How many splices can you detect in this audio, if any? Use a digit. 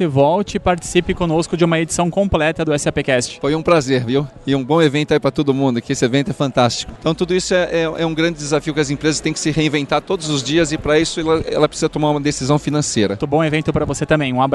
2